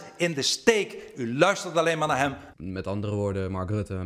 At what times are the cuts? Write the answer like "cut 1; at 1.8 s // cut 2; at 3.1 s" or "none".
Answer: cut 1; at 2.5 s